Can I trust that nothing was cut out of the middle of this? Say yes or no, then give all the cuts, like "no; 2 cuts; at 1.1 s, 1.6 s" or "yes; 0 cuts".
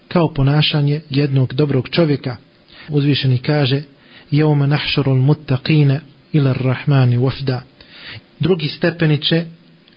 no; 2 cuts; at 2.9 s, 8.2 s